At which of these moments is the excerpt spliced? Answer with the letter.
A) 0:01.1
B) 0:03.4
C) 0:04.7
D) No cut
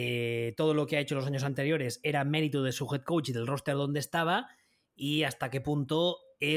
D